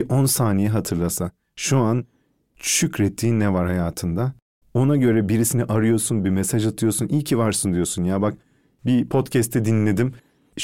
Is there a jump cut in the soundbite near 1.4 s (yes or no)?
no